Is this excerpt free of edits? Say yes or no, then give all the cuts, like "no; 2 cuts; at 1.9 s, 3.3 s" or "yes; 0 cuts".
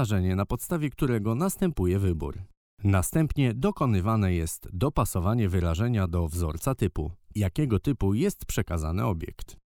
no; 2 cuts; at 2.7 s, 7.3 s